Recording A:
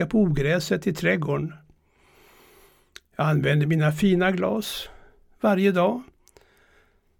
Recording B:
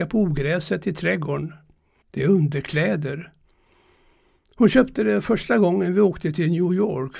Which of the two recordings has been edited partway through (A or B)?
B